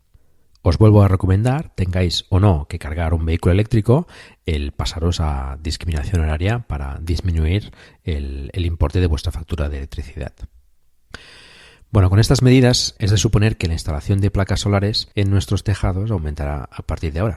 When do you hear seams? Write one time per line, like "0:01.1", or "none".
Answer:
0:13.0
0:15.1